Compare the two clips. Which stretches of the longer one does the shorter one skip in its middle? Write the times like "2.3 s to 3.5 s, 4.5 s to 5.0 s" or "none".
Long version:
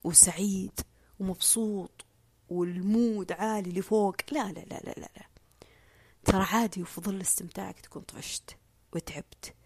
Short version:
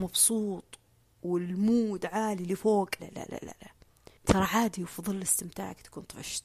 4.3 s to 4.5 s, 5.7 s to 6.2 s